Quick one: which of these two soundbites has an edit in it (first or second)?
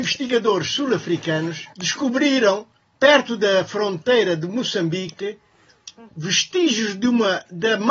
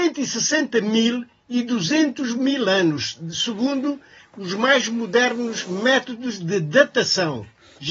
first